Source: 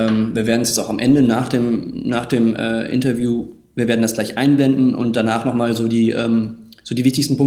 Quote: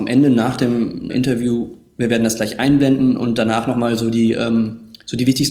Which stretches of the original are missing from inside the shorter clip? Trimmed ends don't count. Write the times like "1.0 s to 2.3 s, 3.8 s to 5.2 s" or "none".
2.0 s to 2.9 s